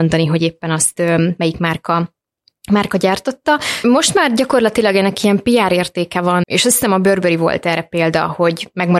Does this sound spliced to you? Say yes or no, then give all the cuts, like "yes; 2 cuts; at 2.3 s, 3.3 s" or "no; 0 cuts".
yes; 2 cuts; at 3.8 s, 6.4 s